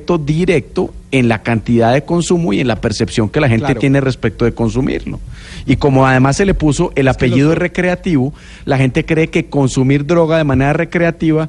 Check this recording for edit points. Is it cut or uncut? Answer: uncut